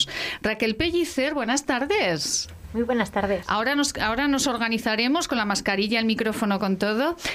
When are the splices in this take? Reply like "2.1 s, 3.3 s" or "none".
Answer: none